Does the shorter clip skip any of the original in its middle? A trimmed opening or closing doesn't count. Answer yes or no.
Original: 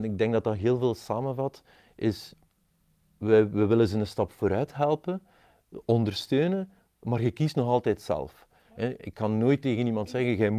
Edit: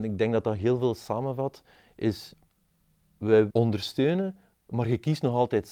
yes